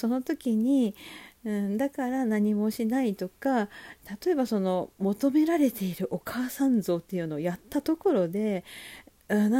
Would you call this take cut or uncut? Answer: uncut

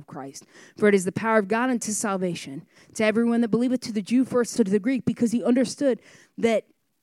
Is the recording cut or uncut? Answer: cut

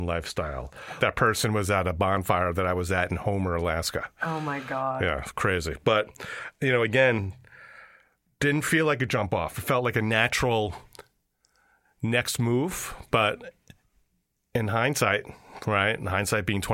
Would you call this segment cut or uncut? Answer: cut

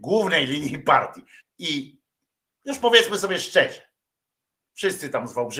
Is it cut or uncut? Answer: cut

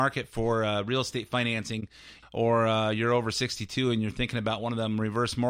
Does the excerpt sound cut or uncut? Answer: cut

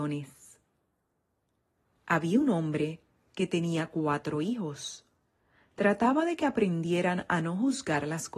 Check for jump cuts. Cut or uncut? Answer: uncut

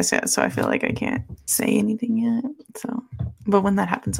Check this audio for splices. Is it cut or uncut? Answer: uncut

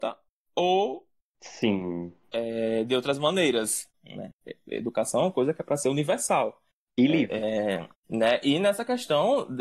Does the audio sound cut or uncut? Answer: cut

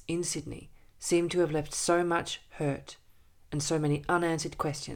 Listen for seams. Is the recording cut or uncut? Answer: uncut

